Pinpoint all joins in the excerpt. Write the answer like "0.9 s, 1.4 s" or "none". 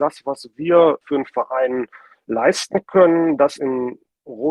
1.0 s